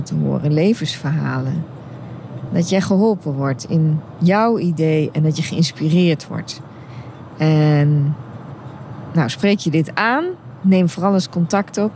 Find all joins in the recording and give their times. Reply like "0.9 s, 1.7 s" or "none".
none